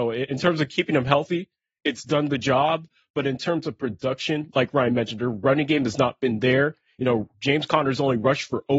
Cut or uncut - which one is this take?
uncut